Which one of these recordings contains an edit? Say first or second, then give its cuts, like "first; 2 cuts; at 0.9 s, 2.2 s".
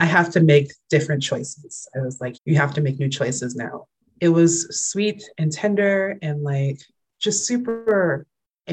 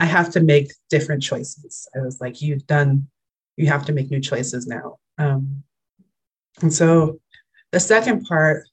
first; 2 cuts; at 2.3 s, 4.0 s